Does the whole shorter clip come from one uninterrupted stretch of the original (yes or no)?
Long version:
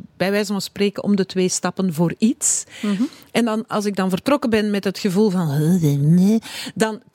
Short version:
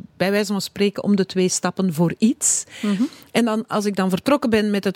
yes